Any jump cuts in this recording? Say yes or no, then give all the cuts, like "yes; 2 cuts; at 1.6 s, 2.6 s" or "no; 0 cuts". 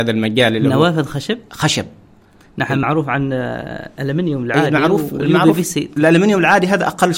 no; 0 cuts